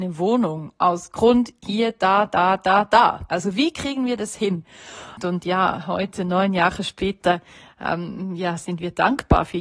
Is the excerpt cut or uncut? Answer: cut